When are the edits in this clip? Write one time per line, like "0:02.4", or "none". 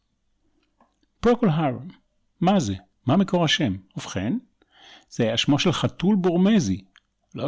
none